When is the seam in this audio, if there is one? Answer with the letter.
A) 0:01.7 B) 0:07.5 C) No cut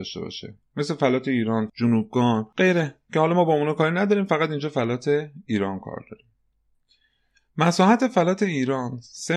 A